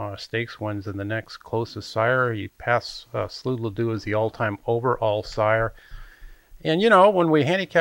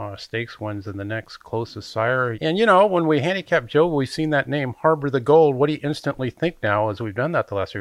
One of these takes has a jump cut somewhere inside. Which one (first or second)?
second